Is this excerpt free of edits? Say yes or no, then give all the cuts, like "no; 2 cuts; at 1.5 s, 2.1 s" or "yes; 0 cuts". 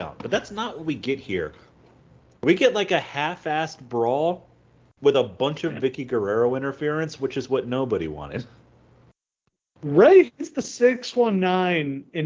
yes; 0 cuts